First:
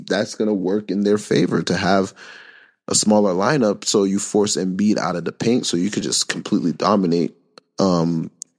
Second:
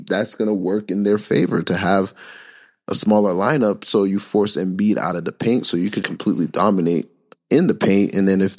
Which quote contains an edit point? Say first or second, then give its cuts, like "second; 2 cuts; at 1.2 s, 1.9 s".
second; 2 cuts; at 6.0 s, 7.3 s